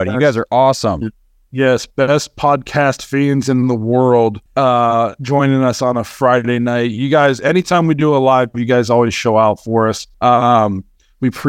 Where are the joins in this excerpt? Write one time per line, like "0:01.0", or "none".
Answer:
0:04.5
0:10.1